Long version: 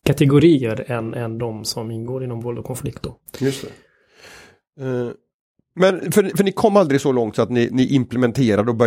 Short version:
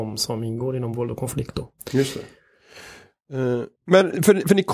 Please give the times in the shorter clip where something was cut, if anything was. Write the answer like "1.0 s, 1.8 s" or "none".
3.8 s